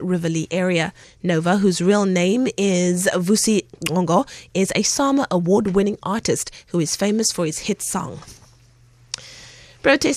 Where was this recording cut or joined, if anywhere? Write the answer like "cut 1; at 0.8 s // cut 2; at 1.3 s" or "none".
cut 1; at 1.0 s